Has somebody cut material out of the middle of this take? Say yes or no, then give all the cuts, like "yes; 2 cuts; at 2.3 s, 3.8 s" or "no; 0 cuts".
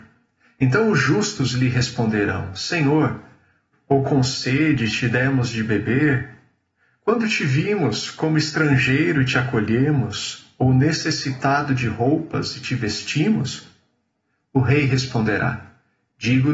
yes; 2 cuts; at 3.7 s, 14.4 s